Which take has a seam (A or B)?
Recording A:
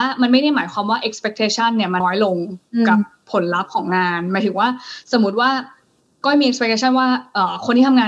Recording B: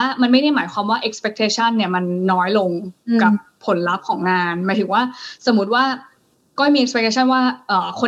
A